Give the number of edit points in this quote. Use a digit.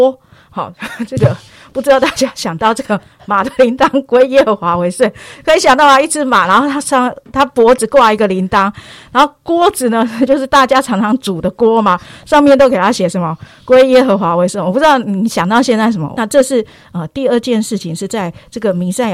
1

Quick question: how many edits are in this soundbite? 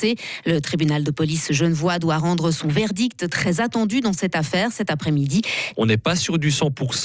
1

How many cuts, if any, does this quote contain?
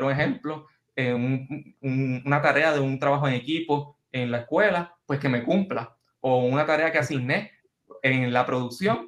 0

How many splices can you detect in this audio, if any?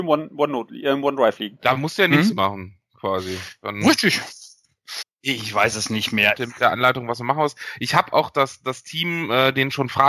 2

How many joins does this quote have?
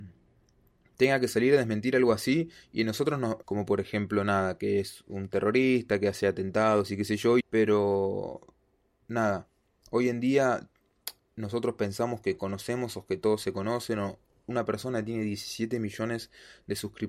2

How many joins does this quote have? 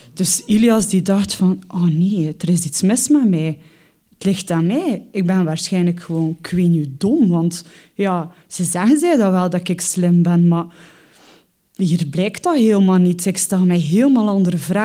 0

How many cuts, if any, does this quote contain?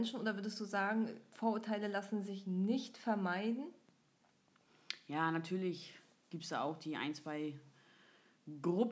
0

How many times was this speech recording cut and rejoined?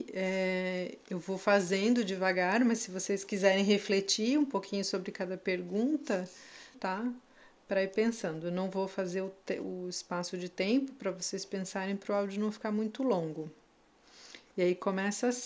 1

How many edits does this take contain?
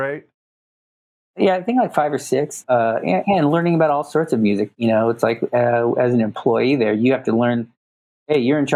1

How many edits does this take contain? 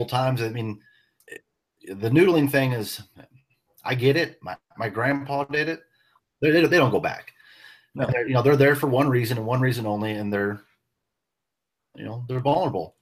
2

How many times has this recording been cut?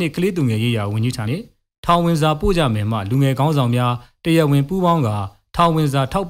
1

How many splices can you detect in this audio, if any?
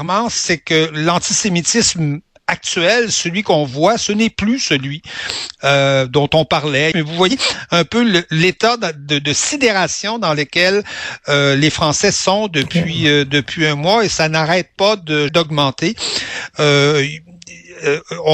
2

